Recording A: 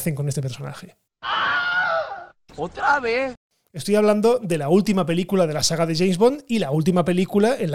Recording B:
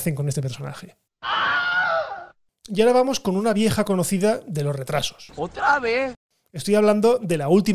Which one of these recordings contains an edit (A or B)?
A